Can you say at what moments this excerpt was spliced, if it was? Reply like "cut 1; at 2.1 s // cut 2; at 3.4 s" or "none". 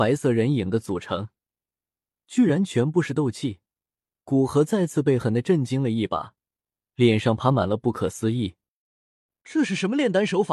cut 1; at 5.2 s